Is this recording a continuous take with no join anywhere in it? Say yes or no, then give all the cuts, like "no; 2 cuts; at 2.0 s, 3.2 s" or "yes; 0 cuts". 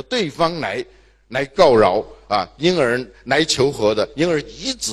yes; 0 cuts